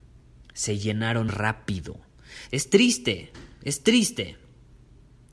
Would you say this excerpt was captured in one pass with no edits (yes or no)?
no